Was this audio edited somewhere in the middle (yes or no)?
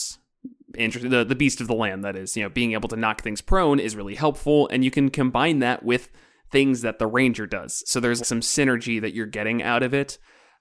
yes